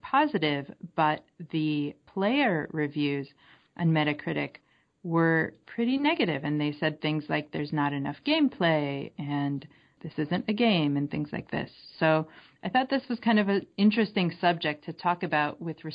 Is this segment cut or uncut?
uncut